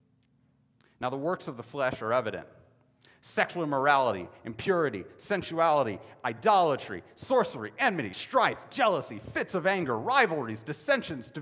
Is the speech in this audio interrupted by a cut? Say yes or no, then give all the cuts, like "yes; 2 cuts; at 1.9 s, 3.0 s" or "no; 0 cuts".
no; 0 cuts